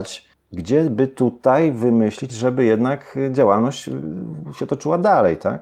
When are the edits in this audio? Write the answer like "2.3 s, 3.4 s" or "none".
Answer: 2.3 s

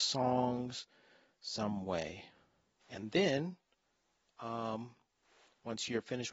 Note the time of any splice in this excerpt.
2.8 s

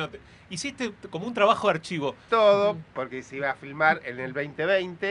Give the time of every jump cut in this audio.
2.3 s

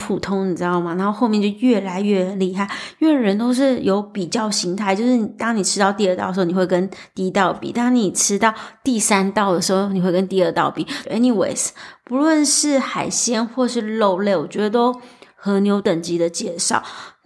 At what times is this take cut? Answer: 11.0 s, 15.3 s

